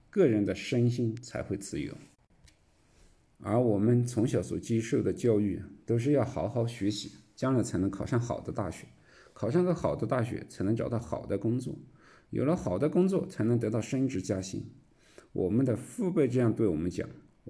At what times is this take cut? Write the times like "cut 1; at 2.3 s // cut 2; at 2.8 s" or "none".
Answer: none